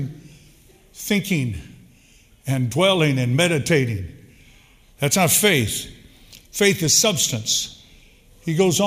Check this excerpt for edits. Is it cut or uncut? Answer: uncut